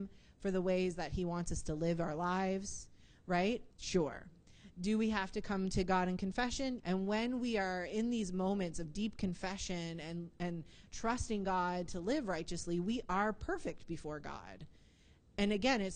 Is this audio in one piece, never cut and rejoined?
no; 2 cuts; at 3.7 s, 6.8 s

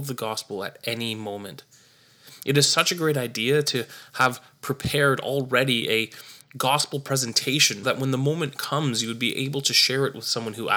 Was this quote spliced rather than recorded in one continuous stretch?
yes; 1 cut; at 7.8 s

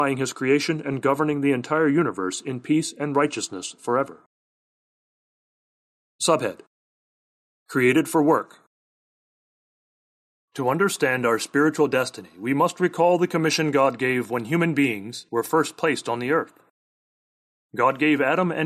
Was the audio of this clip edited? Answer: no; 0 cuts

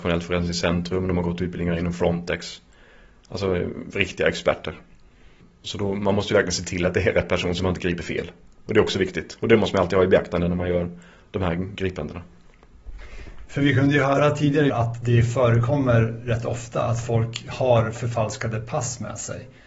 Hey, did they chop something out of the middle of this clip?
yes; 1 cut; at 14.7 s

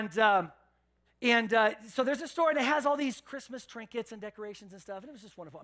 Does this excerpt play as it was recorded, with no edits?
no; 1 cut; at 1.0 s

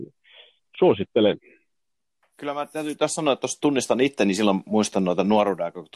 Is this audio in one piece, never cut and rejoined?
yes; 0 cuts

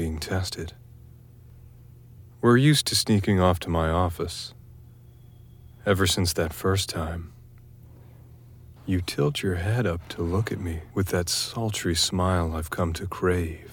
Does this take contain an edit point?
yes; 2 cuts; at 8.8 s, 10.9 s

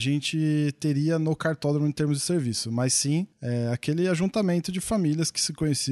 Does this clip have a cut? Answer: no; 0 cuts

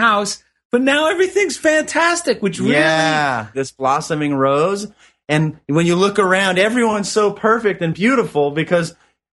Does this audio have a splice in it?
yes; 1 cut; at 3.5 s

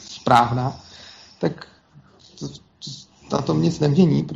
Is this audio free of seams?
yes; 0 cuts

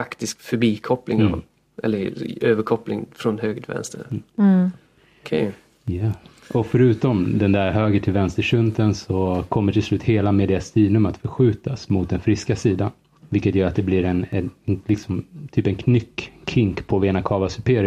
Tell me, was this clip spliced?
no; 0 cuts

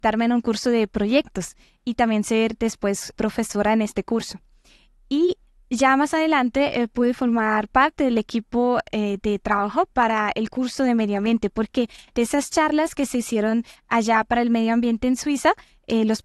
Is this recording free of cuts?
no; 1 cut; at 3.1 s

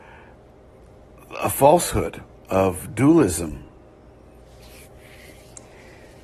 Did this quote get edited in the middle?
no; 0 cuts

